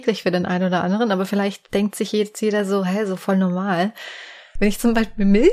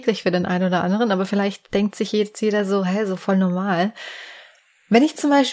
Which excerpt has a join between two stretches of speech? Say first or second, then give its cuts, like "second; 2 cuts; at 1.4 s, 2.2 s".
first; 1 cut; at 4.6 s